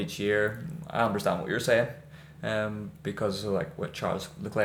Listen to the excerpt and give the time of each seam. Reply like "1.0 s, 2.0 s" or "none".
none

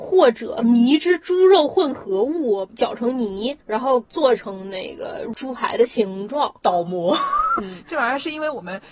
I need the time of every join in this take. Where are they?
7.6 s

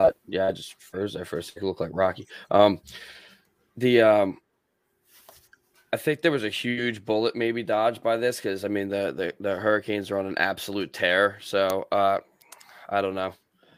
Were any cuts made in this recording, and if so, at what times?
none

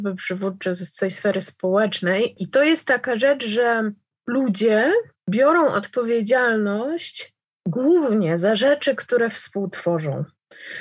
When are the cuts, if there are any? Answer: 2.4 s

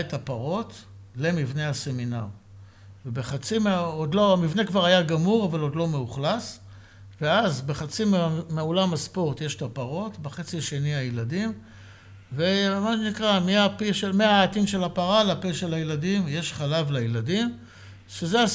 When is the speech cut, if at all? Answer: none

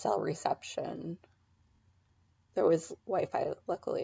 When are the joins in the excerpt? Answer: none

